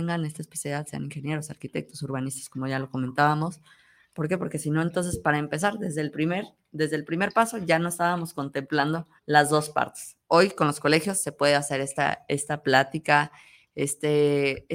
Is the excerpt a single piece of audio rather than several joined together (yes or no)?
no